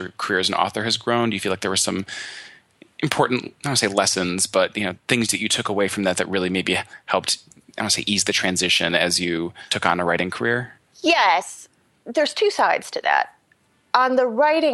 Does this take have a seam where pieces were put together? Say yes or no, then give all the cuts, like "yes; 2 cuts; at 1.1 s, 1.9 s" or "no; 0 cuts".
no; 0 cuts